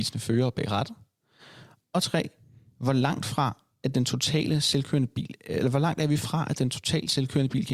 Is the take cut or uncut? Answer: uncut